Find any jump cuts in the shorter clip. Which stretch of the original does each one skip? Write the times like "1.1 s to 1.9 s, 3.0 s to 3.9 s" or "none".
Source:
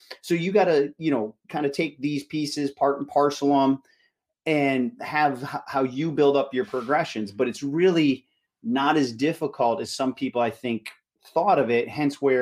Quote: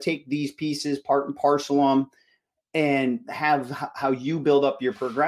none